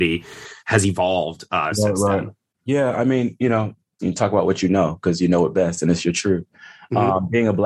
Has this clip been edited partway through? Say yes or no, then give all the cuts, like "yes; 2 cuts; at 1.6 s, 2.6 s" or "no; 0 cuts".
yes; 1 cut; at 4.0 s